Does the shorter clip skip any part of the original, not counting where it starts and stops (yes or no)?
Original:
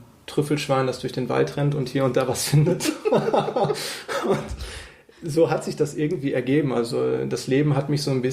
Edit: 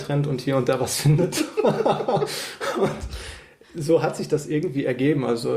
no